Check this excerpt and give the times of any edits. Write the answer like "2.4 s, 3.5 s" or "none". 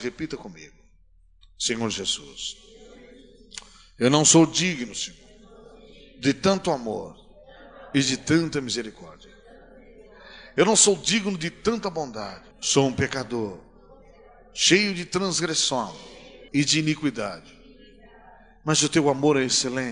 12.5 s, 16.5 s